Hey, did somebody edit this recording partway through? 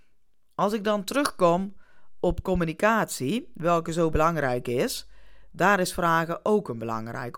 no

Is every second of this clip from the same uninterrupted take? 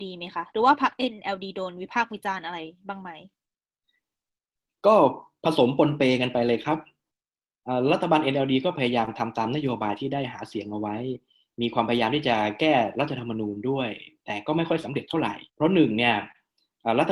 no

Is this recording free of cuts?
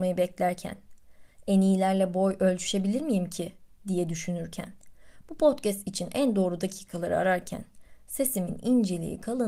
yes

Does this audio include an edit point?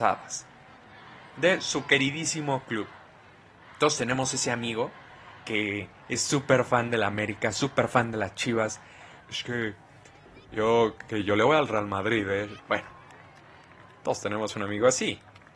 yes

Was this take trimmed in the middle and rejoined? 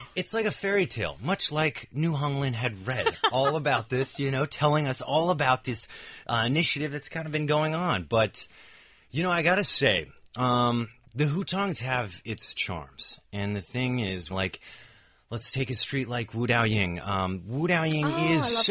yes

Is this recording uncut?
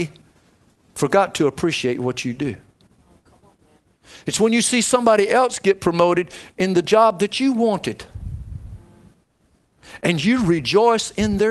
yes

